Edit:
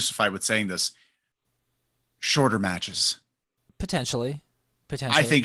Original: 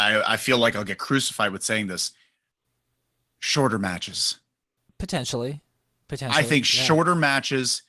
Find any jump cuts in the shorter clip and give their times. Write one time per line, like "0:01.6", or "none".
none